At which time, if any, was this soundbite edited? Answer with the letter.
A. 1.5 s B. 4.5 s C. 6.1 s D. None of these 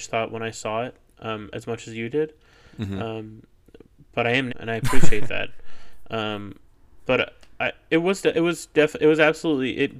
B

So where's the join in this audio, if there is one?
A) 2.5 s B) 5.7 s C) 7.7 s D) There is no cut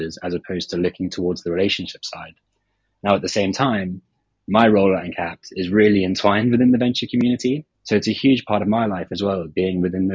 C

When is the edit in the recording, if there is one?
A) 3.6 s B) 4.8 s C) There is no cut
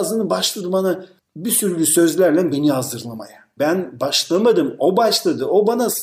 A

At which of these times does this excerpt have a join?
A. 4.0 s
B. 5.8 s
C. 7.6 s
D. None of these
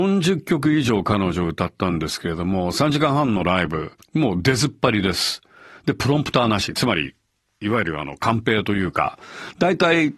A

